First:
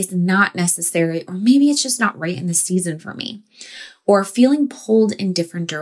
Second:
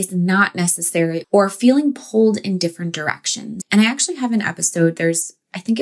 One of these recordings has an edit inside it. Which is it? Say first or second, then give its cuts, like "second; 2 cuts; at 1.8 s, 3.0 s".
second; 2 cuts; at 1.2 s, 3.6 s